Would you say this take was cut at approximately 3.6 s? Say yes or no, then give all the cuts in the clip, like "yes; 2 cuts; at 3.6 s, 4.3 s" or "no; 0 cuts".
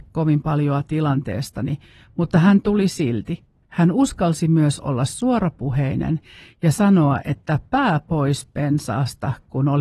yes; 1 cut; at 3.6 s